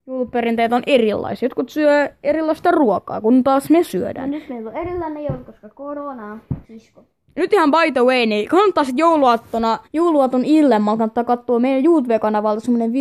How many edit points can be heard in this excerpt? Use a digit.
2